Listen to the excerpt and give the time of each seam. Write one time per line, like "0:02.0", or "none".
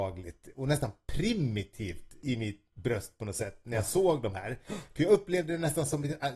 none

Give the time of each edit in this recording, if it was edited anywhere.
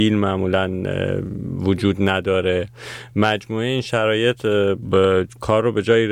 0:04.8

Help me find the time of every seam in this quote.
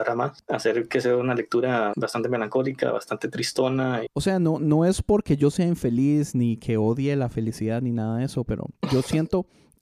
0:01.9
0:04.1

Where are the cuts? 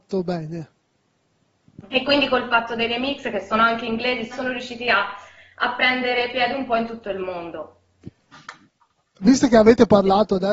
0:01.8
0:04.3

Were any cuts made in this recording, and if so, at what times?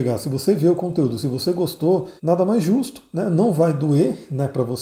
0:02.2

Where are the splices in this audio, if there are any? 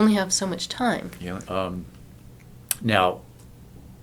0:01.5

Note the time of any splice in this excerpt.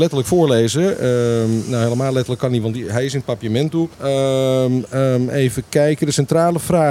0:03.9

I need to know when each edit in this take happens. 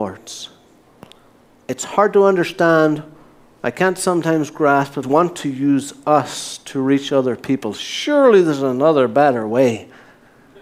0:05.0

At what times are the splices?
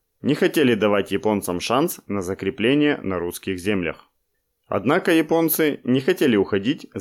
none

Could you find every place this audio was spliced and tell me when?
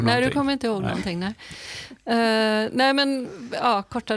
none

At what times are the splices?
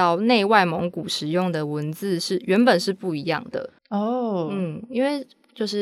0:03.8

